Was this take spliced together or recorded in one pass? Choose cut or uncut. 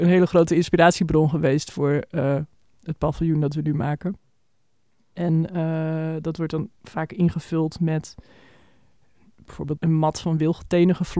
cut